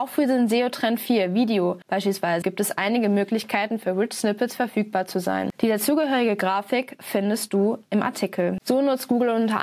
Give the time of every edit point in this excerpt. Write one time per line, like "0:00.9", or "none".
0:02.4